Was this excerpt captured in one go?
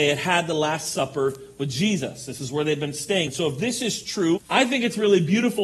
no; 1 cut; at 4.4 s

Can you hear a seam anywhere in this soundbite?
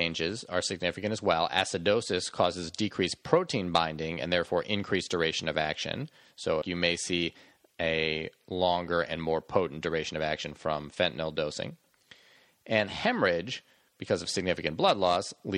yes; 1 cut; at 6.6 s

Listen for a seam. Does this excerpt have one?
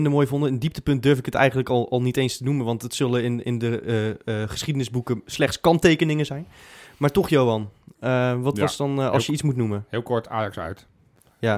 no; 0 cuts

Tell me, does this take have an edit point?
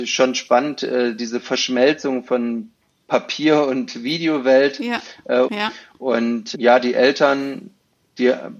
yes; 2 cuts; at 5.4 s, 6.5 s

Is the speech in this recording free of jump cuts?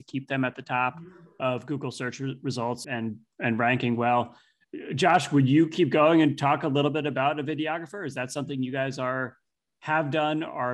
no; 1 cut; at 2.8 s

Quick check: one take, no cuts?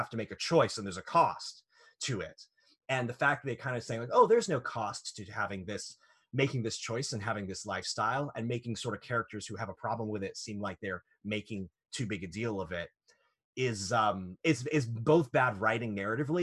yes; 0 cuts

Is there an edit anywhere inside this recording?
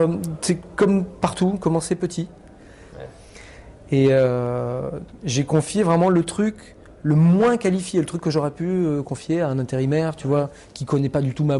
yes; 1 cut; at 2.9 s

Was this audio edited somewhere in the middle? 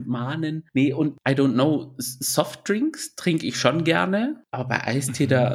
no; 0 cuts

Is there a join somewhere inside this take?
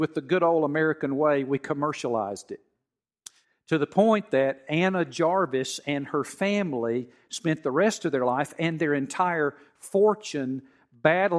no; 0 cuts

